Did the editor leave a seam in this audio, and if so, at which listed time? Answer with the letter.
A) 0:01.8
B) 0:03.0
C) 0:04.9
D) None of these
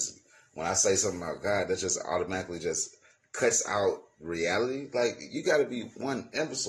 D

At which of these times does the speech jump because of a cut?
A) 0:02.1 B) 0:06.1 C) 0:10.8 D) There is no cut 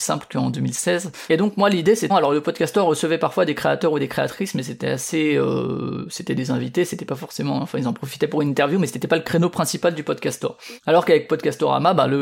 A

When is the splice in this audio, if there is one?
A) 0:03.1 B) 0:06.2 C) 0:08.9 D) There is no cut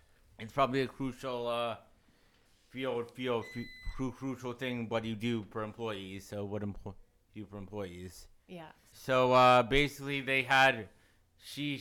C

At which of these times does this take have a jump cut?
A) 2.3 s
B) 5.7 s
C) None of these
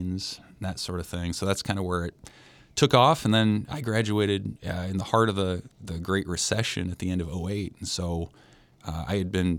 C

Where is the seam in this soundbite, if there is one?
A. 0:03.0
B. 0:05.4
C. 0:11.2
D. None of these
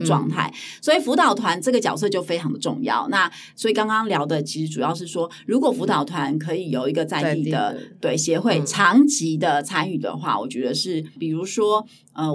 C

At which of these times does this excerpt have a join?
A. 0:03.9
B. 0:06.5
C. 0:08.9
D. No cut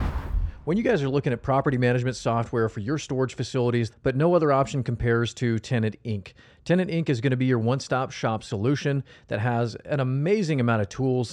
A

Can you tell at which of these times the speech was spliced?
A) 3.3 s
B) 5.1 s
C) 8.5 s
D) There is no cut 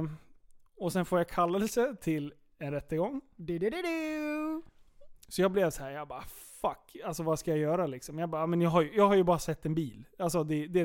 B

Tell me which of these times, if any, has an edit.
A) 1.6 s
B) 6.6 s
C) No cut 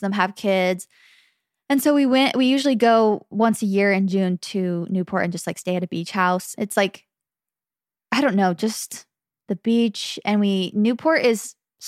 B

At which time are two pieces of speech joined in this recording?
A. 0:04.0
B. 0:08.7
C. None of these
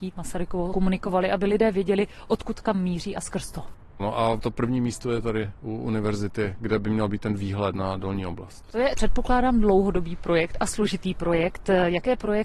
A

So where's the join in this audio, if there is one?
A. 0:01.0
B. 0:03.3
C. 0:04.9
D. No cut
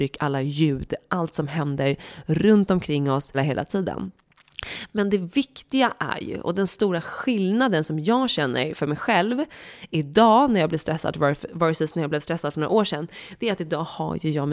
B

